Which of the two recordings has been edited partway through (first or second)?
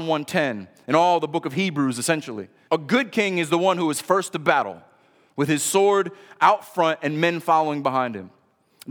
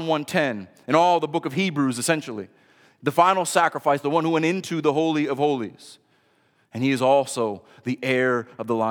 first